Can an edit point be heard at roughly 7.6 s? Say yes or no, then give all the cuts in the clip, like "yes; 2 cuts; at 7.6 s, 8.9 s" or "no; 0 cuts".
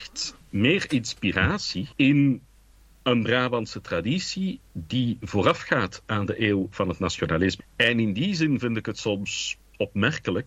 yes; 2 cuts; at 1.9 s, 7.6 s